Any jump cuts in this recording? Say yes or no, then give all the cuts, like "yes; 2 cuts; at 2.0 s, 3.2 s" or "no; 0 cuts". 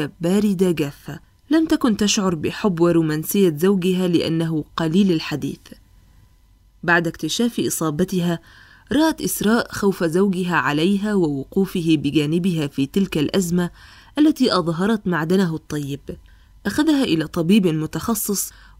no; 0 cuts